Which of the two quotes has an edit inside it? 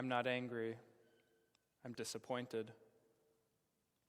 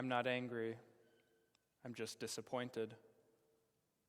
first; 1 cut; at 1.9 s

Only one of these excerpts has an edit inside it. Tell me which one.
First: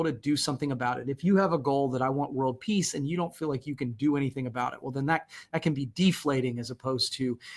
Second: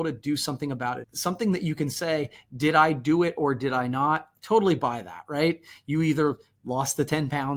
second; 1 cut; at 1.0 s

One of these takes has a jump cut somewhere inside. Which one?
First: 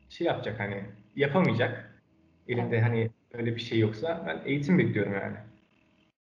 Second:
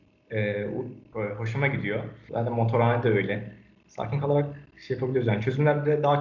second; 2 cuts; at 1.1 s, 2.3 s

